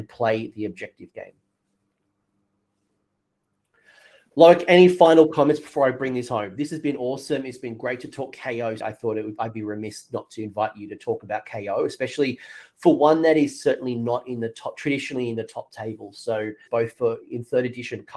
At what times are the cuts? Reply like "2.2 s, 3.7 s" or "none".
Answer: 8.8 s, 16.7 s